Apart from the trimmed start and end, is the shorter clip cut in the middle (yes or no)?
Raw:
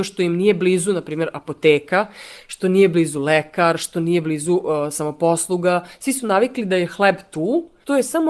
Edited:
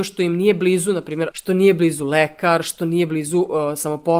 yes